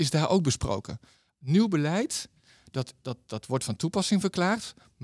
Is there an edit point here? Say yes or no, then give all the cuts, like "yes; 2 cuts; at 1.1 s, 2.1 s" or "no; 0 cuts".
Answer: no; 0 cuts